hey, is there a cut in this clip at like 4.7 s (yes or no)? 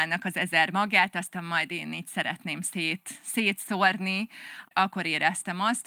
yes